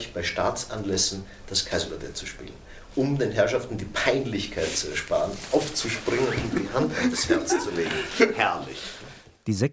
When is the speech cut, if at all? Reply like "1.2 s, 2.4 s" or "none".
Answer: none